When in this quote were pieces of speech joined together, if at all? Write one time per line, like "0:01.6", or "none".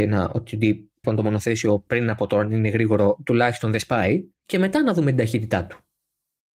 0:01.0
0:04.4